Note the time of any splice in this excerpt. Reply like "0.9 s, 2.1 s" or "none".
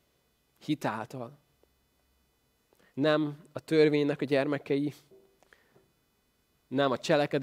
2.9 s